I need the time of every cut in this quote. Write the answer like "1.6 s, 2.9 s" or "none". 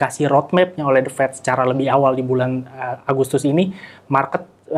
none